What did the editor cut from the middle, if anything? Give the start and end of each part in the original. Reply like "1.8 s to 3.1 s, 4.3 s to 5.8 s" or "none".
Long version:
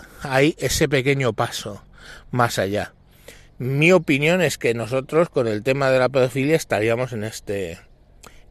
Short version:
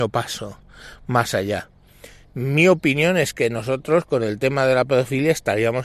none